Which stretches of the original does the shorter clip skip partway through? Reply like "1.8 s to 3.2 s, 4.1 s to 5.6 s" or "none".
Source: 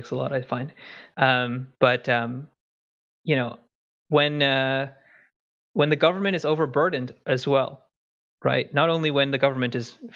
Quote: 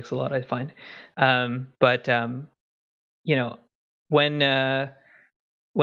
none